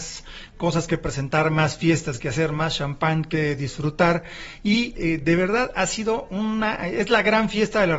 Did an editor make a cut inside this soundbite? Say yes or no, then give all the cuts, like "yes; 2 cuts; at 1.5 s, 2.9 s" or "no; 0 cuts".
no; 0 cuts